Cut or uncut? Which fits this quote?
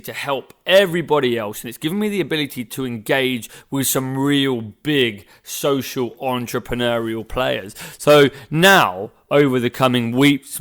uncut